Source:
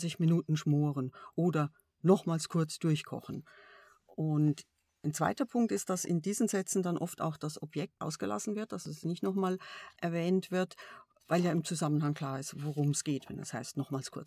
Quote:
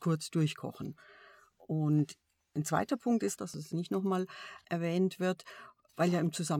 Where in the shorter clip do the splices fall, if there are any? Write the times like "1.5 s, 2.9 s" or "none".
3.4 s